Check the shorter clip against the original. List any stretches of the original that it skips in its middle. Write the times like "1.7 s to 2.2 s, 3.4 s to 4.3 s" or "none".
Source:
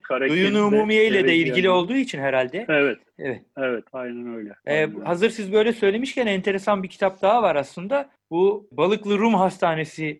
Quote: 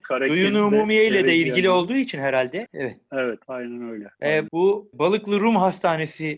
2.7 s to 3.1 s, 4.9 s to 8.3 s